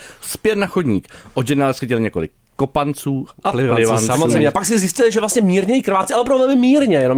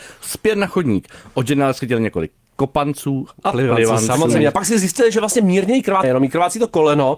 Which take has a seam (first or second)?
second